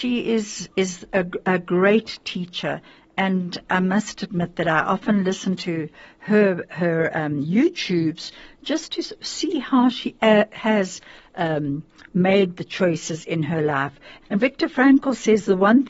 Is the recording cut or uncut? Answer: cut